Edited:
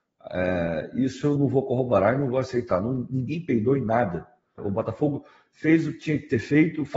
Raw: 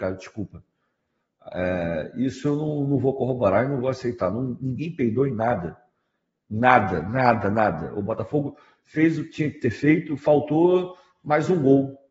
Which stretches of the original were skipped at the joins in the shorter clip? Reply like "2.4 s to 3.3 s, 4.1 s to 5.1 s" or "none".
2.6 s to 2.9 s, 6.1 s to 7.9 s